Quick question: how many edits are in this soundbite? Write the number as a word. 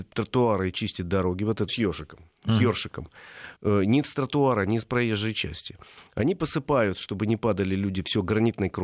two